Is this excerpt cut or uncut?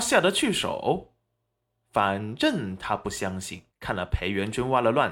cut